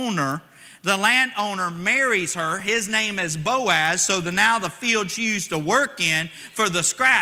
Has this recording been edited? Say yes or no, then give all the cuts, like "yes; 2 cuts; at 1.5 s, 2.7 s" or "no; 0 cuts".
no; 0 cuts